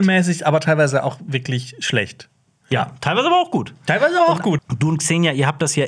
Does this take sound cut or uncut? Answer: cut